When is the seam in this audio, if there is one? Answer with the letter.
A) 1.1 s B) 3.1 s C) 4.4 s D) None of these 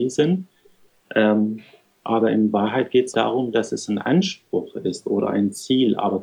B